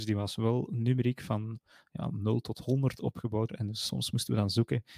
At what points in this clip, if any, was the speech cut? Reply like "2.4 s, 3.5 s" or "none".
3.5 s